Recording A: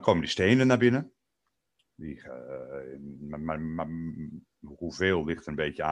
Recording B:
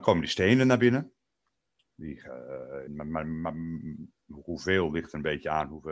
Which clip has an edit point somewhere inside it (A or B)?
B